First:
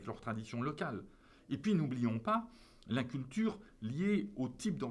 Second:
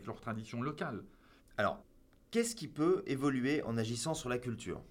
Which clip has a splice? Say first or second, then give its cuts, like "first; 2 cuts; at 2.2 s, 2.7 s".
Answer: second; 1 cut; at 1.4 s